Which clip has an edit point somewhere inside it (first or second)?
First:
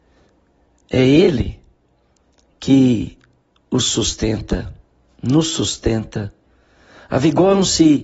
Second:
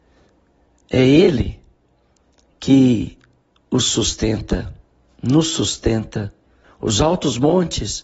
second